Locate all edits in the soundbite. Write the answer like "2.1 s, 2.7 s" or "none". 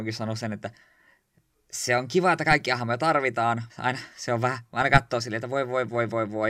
3.7 s